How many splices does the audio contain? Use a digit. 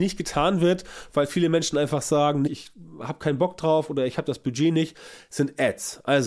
1